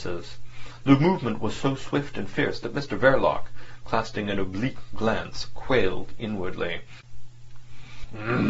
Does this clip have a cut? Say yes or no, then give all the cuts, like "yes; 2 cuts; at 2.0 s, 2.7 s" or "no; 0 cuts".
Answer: no; 0 cuts